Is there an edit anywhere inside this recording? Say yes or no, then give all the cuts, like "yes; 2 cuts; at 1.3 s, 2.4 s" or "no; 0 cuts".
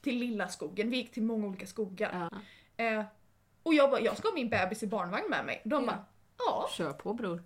yes; 1 cut; at 2.3 s